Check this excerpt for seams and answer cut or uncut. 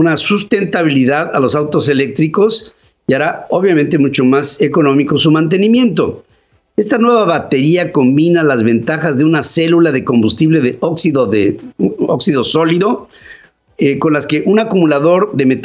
uncut